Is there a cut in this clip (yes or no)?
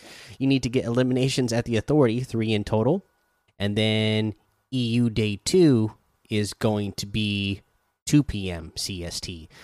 yes